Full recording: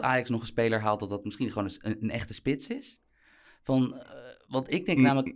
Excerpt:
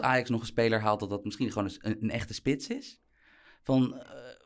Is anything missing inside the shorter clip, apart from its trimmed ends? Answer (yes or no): no